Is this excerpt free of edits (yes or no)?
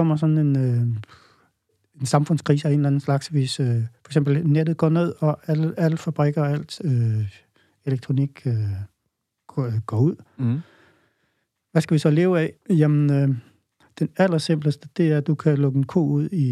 yes